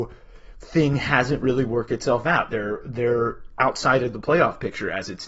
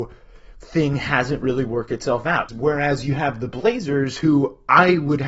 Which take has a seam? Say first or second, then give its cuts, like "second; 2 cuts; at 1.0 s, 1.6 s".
second; 1 cut; at 2.5 s